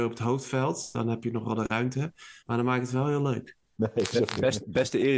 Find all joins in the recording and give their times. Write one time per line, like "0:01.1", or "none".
0:02.4
0:03.8